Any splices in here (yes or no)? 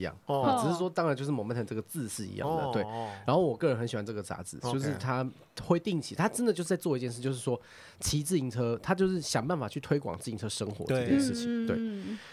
no